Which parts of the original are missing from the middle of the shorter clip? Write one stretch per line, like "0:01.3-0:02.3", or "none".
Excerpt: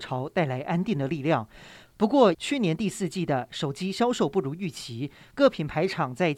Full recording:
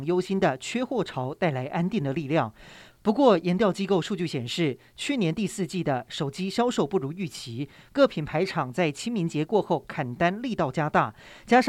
0:03.4-0:04.9